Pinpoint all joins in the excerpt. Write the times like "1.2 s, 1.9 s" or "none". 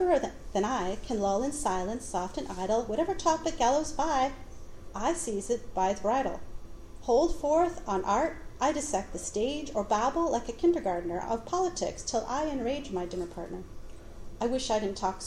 none